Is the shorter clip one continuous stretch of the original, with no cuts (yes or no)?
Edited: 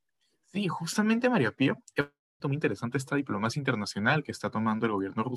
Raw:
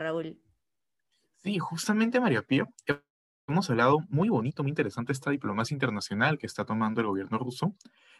no